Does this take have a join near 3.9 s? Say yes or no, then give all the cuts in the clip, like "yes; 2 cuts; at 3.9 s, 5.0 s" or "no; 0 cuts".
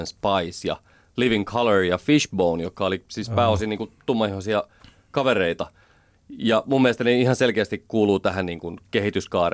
no; 0 cuts